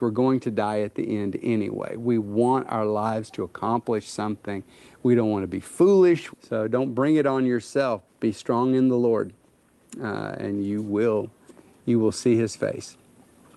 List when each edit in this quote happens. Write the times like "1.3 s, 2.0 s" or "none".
6.3 s, 8.1 s